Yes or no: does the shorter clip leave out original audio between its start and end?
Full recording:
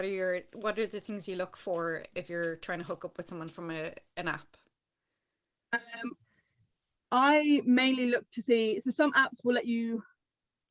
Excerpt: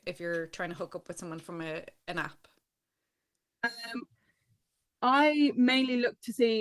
no